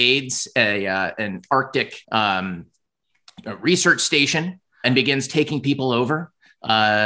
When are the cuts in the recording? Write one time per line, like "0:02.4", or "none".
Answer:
0:02.0
0:04.8

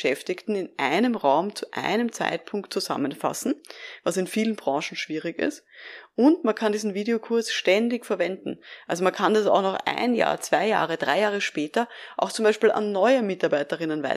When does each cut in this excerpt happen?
none

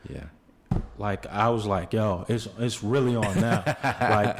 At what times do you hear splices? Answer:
none

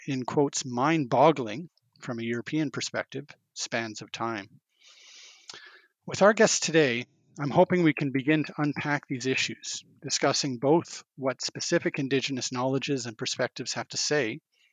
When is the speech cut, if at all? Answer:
none

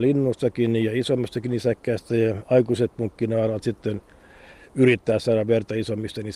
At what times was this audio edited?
none

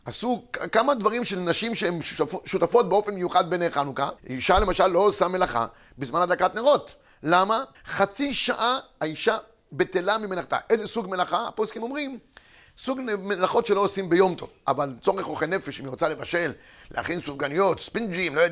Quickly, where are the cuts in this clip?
0:04.2
0:07.7

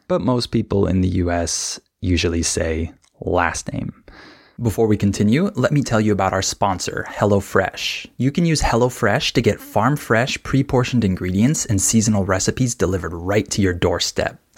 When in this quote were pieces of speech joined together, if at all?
none

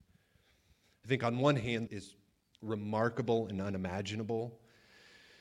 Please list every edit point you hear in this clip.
0:01.9

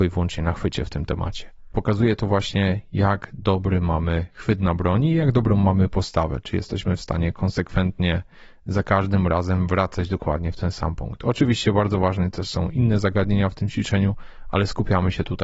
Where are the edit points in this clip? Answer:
0:01.7

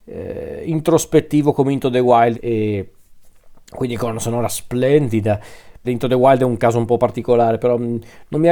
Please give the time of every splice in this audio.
0:02.3
0:05.8

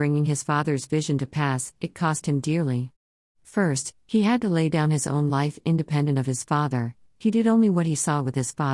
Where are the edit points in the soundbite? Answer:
none

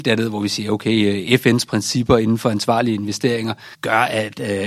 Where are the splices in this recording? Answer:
0:03.7

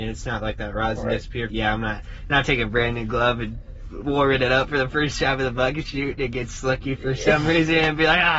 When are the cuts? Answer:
0:01.5

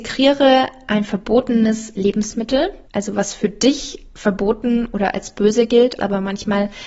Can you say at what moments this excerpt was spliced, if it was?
0:02.9
0:06.0

